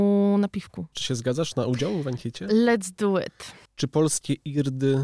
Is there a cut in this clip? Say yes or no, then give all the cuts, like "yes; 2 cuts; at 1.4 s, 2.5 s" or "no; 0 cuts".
yes; 2 cuts; at 0.9 s, 3.7 s